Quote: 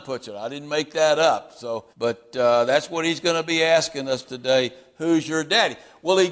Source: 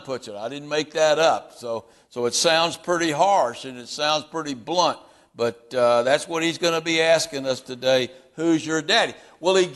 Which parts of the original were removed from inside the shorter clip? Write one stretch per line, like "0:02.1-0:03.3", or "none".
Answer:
0:01.9-0:05.3